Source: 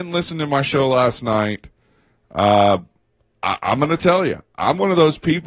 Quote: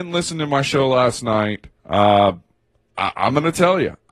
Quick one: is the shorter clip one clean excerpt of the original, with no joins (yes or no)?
no